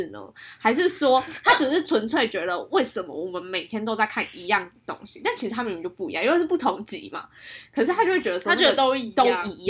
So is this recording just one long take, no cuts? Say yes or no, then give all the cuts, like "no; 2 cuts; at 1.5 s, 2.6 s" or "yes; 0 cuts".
yes; 0 cuts